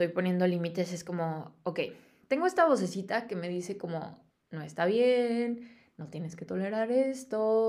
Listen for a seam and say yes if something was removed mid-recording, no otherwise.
no